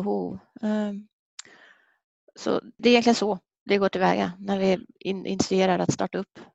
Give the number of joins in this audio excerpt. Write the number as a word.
two